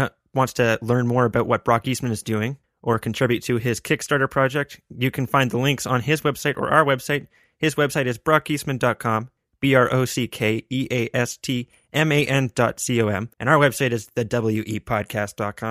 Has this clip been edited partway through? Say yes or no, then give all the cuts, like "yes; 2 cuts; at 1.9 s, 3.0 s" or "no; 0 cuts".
yes; 1 cut; at 13.3 s